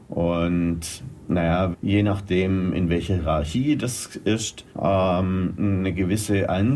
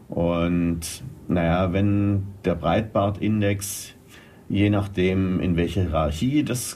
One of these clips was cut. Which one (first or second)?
first